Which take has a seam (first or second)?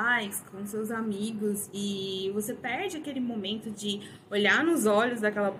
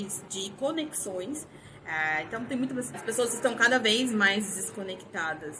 second